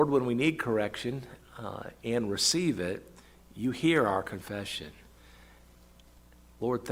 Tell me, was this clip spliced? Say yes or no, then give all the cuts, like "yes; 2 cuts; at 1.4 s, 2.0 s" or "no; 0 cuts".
no; 0 cuts